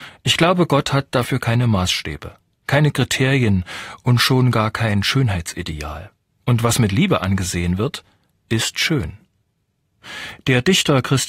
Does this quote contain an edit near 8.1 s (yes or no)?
no